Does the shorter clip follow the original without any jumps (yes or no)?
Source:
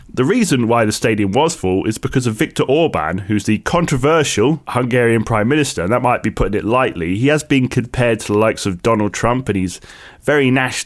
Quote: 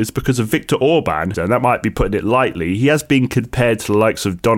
no